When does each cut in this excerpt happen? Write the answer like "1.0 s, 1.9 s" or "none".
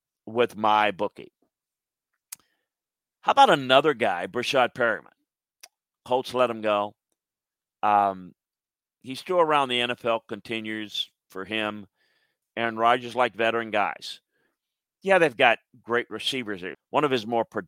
12.4 s, 16.7 s